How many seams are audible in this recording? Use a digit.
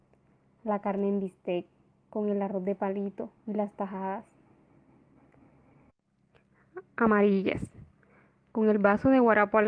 1